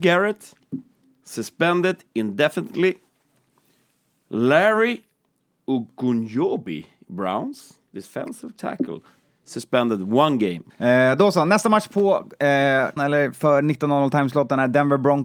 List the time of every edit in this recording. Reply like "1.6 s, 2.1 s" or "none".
10.7 s, 13.0 s